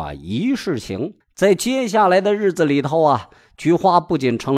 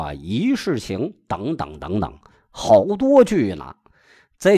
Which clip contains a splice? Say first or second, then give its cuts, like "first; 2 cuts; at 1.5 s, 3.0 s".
first; 1 cut; at 1.2 s